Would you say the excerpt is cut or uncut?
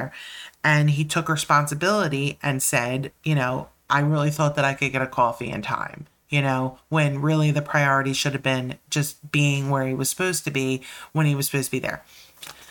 uncut